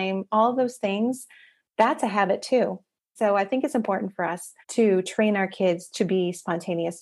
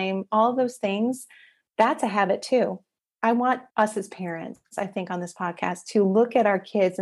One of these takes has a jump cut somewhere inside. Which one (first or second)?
first